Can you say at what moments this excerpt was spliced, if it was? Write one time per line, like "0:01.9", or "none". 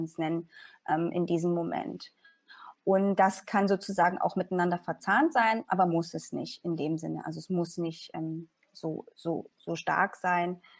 none

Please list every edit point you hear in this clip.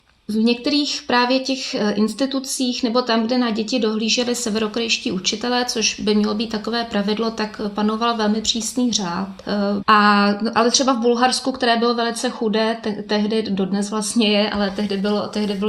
0:09.8

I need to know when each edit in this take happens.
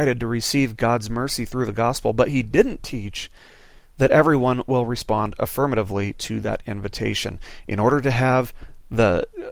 none

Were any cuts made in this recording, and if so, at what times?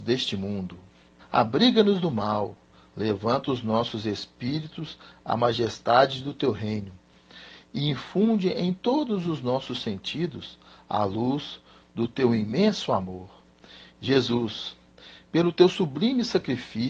0:01.2

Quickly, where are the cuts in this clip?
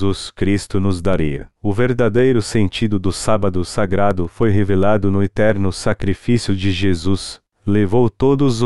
0:01.6
0:07.5

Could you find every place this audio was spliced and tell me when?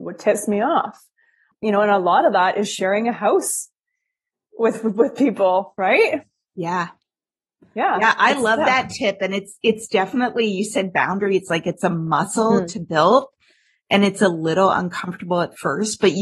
none

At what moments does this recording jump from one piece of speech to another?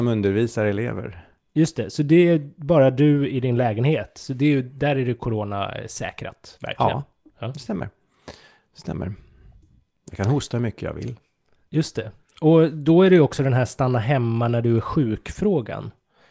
none

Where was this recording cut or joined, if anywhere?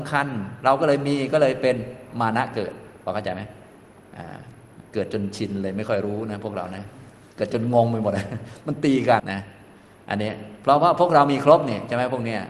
0:09.2

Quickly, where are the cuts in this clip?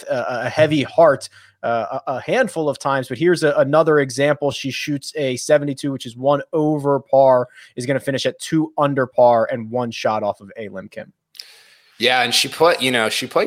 none

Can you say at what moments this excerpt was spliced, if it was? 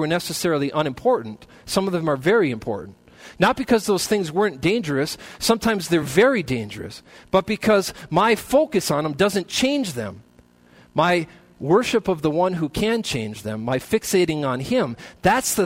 none

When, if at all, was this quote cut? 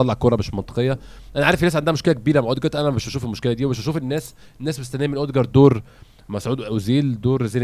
none

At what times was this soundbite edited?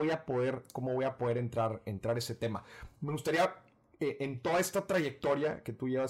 none

